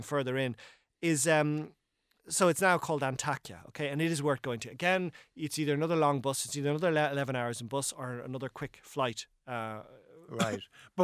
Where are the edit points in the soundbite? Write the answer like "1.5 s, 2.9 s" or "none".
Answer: none